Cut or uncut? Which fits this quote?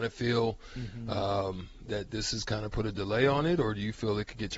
uncut